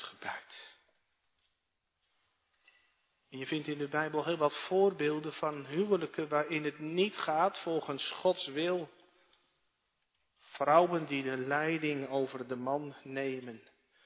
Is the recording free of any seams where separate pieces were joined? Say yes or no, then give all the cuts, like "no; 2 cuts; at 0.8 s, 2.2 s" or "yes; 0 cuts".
yes; 0 cuts